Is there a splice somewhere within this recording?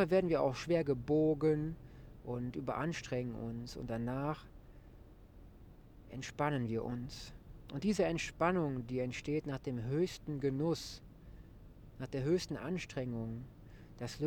no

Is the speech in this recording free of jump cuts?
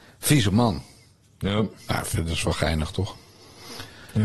yes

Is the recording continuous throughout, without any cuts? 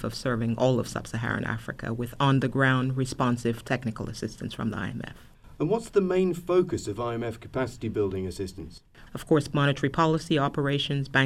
no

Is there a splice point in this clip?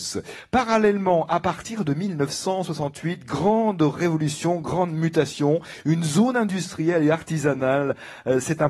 no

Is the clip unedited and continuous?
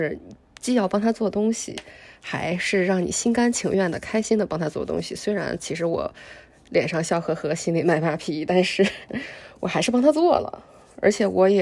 yes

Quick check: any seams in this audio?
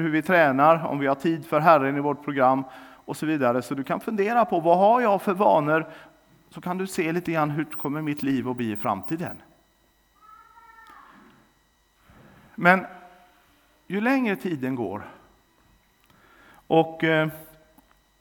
no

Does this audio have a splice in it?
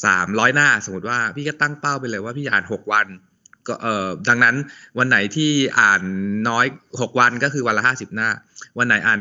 no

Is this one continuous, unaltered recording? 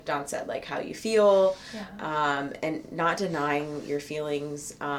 yes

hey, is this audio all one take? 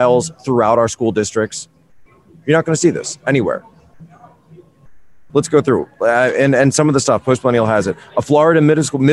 yes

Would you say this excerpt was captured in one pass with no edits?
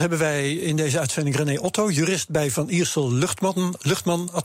yes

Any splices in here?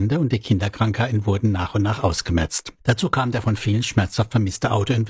no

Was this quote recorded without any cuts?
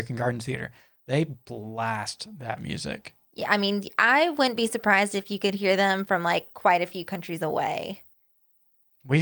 yes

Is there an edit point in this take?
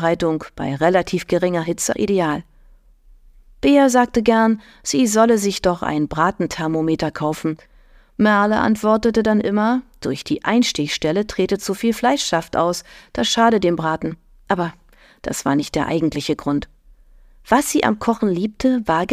yes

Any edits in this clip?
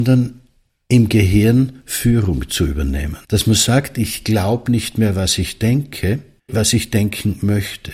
yes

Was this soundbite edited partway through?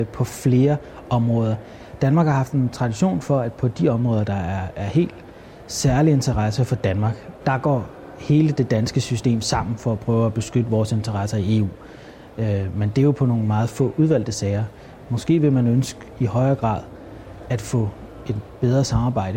yes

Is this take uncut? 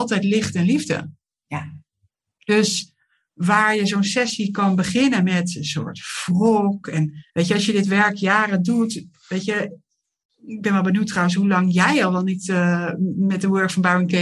no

